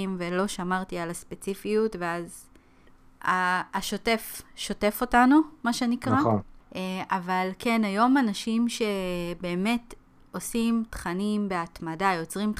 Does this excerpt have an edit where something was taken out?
no; 0 cuts

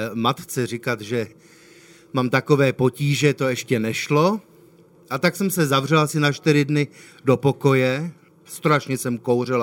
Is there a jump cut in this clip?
no; 0 cuts

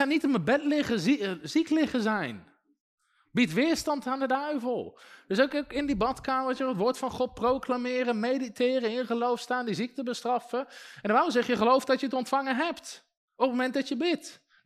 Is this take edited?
no; 0 cuts

